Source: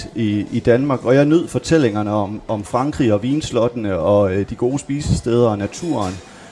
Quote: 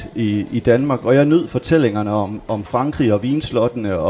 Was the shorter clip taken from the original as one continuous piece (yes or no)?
yes